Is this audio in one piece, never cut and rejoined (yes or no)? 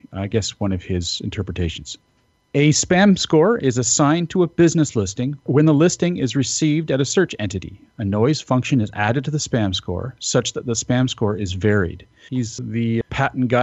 no